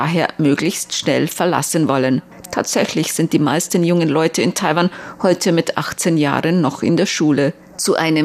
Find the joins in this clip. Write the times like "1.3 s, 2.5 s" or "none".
2.4 s

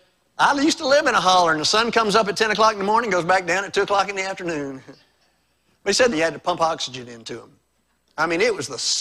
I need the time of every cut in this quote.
6.1 s

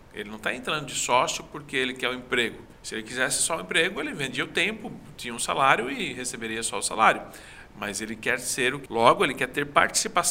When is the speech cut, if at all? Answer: 2.7 s, 8.9 s

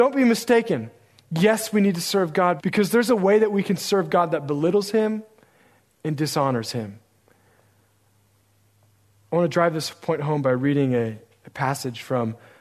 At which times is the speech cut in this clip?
2.6 s

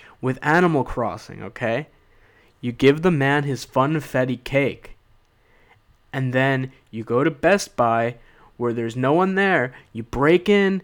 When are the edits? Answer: none

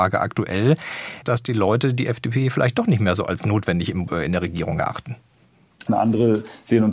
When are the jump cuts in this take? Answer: 1.2 s, 5.9 s

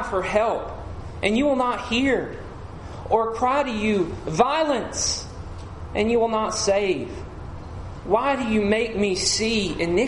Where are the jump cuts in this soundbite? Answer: none

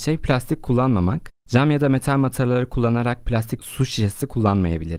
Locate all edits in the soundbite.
1.4 s

